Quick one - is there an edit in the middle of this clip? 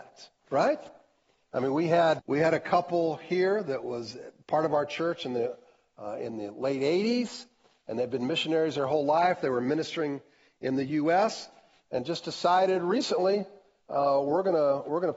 yes; 1 cut; at 2.2 s

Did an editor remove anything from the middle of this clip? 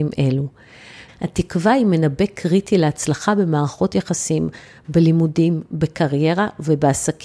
yes; 1 cut; at 1.1 s

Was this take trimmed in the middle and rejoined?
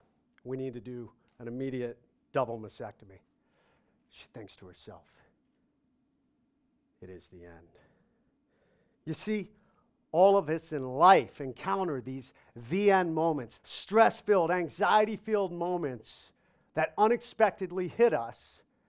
yes; 1 cut; at 13.6 s

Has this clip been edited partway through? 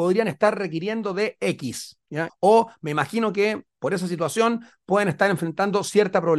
yes; 1 cut; at 2.3 s

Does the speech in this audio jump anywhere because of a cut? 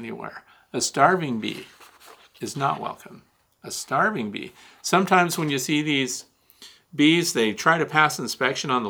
no; 0 cuts

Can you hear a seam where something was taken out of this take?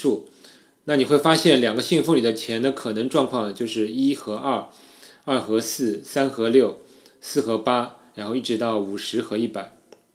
no; 0 cuts

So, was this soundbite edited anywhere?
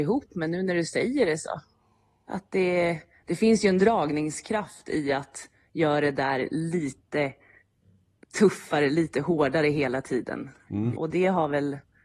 yes; 1 cut; at 10.9 s

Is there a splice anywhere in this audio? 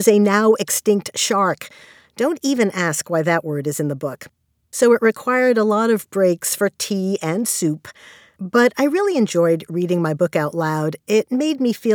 yes; 1 cut; at 4.7 s

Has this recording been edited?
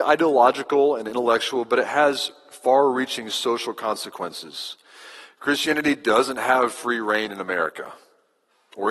no; 0 cuts

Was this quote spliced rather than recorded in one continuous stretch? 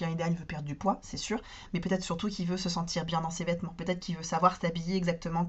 no; 0 cuts

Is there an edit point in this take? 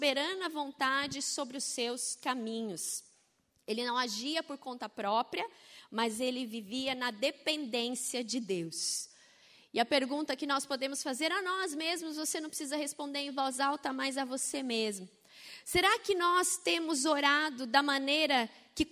no; 0 cuts

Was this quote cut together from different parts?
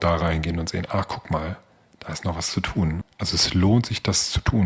yes; 1 cut; at 3.0 s

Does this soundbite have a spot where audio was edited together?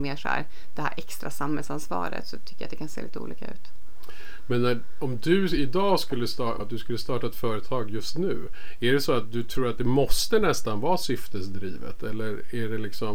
yes; 1 cut; at 6.6 s

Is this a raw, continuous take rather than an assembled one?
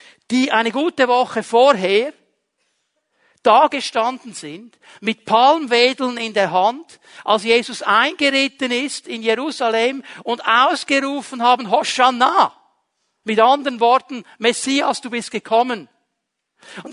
no; 1 cut; at 13.2 s

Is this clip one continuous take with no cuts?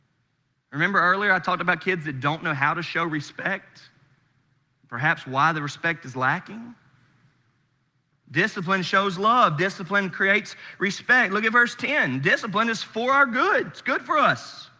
yes; 0 cuts

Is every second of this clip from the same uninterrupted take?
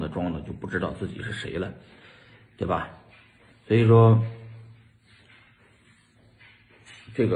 yes; 0 cuts

